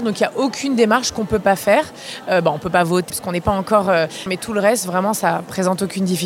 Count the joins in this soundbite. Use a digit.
2